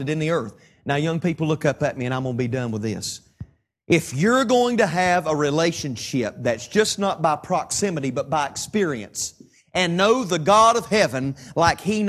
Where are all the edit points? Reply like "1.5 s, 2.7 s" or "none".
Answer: none